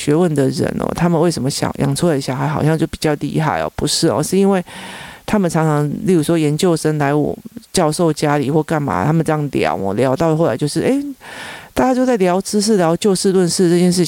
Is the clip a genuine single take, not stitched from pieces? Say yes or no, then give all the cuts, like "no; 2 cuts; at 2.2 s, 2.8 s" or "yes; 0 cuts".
yes; 0 cuts